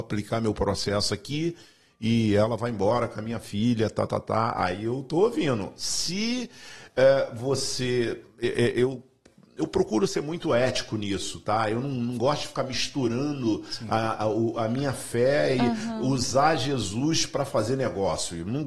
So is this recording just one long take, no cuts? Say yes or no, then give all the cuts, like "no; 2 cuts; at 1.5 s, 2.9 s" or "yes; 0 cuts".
yes; 0 cuts